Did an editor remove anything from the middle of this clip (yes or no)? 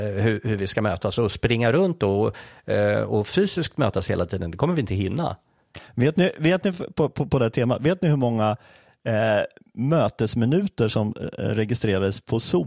no